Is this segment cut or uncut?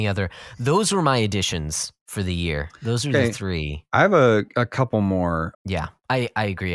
cut